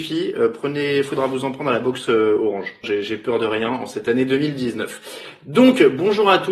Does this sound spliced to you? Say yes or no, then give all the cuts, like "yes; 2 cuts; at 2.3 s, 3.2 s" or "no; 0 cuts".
yes; 1 cut; at 2.8 s